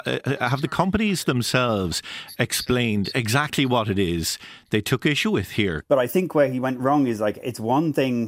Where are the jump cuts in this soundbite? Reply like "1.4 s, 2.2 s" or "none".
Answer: 5.8 s